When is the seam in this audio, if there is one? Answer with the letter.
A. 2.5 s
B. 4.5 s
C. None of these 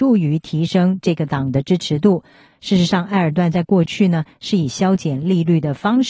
A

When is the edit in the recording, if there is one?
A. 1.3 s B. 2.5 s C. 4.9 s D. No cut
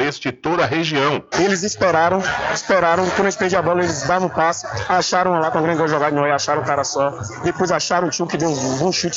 A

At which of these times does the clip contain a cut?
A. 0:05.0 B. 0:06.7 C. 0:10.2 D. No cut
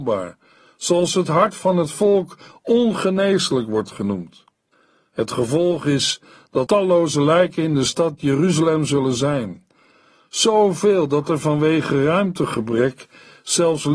B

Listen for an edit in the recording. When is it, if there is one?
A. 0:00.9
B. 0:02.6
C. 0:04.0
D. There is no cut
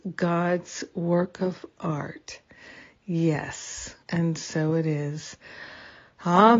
C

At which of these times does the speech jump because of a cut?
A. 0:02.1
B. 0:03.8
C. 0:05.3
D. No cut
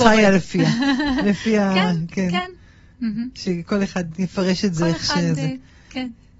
D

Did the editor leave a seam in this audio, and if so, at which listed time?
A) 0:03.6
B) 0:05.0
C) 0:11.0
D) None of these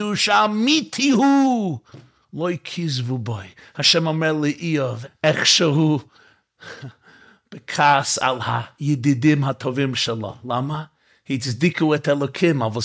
B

